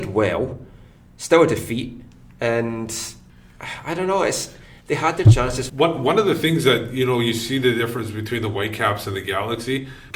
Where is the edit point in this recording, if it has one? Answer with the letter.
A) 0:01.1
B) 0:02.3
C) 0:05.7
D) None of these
C